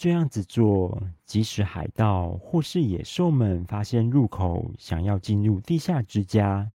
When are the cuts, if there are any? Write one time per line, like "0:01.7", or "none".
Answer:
none

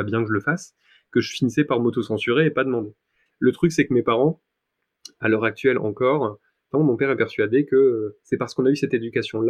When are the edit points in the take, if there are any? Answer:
0:03.3
0:06.7

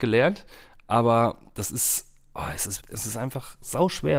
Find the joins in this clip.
0:02.8

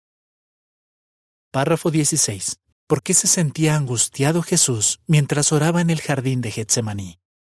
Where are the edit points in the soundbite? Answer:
0:02.7

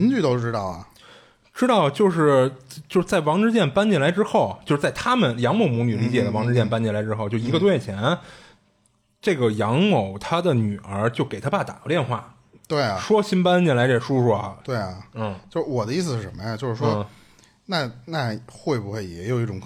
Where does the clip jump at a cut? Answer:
0:14.6

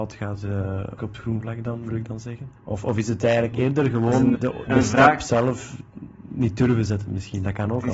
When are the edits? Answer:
0:01.0
0:02.6
0:04.3

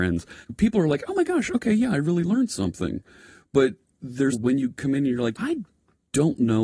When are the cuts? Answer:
0:04.3
0:05.3

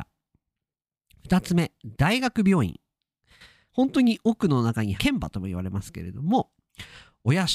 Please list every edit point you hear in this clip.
0:03.7
0:05.0

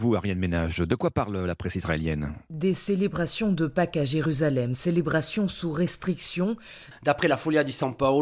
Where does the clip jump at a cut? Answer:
0:06.9

